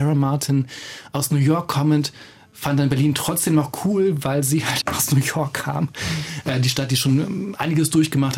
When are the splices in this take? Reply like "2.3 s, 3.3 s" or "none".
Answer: 4.8 s